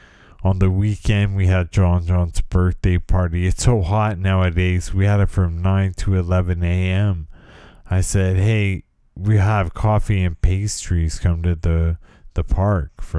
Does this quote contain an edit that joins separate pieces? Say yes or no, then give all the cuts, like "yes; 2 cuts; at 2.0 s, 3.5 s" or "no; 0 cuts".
no; 0 cuts